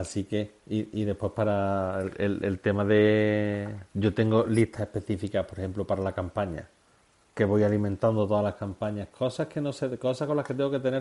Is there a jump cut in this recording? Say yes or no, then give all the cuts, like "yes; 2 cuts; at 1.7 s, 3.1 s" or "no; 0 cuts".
no; 0 cuts